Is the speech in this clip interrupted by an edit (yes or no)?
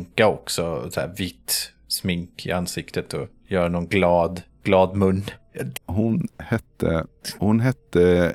yes